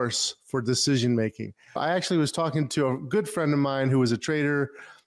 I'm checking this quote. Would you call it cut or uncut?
cut